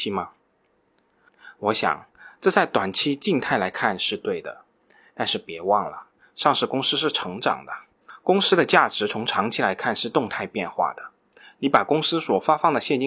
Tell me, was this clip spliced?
no; 0 cuts

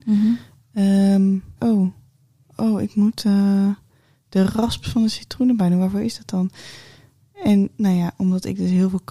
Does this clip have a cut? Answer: yes; 1 cut; at 1.6 s

